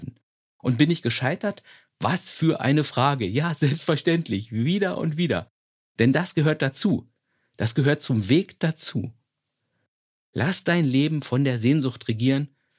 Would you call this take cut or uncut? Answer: uncut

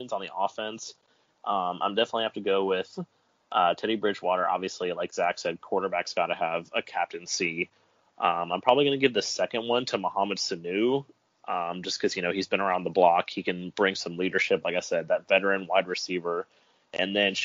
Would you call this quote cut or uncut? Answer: uncut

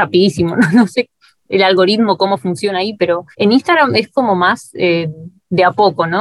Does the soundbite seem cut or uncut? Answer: cut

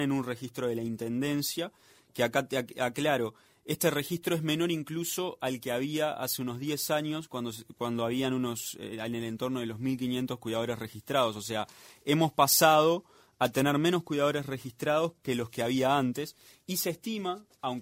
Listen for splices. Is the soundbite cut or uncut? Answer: uncut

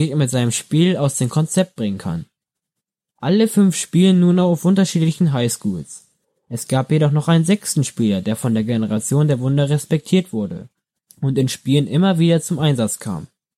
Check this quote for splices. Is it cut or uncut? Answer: uncut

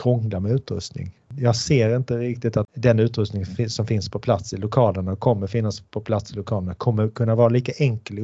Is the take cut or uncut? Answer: uncut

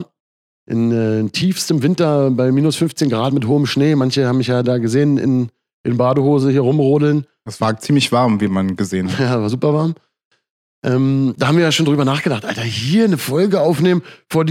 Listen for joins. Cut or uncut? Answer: uncut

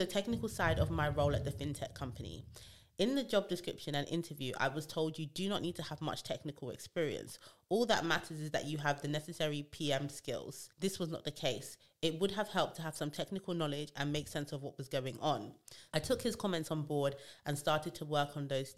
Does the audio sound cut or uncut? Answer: cut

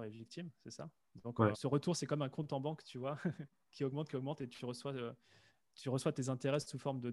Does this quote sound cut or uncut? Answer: cut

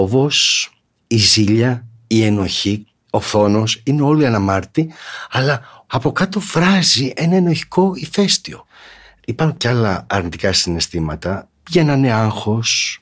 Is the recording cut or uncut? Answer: uncut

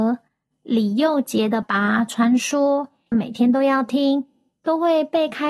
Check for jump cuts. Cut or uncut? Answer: cut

